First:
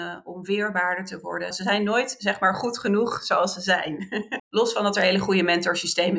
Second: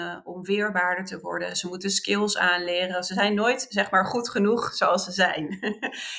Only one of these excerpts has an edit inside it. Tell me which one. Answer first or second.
first